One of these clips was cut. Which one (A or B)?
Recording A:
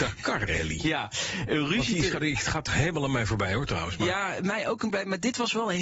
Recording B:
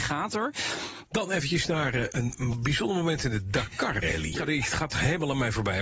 B